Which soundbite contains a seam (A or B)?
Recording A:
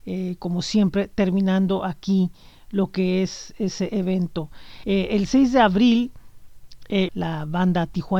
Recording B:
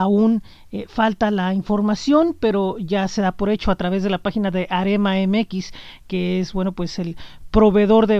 A